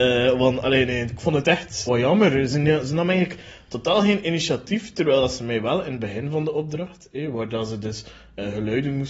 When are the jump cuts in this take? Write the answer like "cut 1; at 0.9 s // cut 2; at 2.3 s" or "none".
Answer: cut 1; at 1.9 s

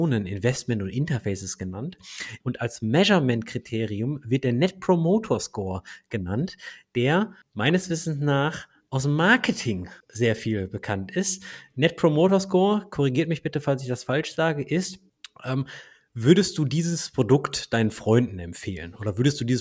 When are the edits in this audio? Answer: cut 1; at 2.4 s

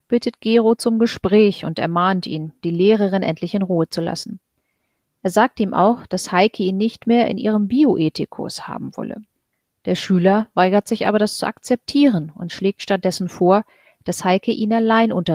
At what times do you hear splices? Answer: none

